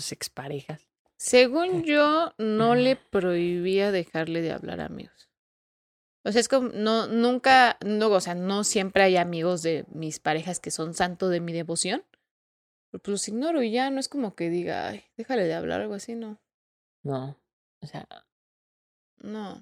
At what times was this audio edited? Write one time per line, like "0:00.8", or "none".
none